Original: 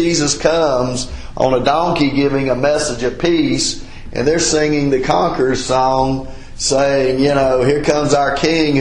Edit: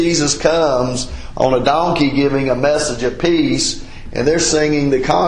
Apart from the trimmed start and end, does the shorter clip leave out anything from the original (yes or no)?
no